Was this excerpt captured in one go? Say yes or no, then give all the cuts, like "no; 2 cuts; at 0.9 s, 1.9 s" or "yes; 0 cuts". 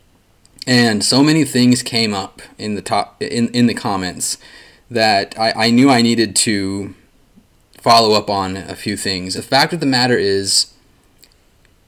no; 1 cut; at 9.4 s